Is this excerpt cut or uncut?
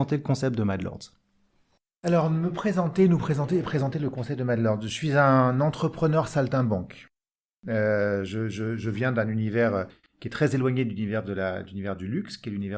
uncut